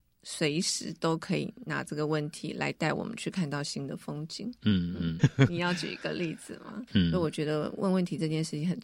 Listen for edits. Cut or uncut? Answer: cut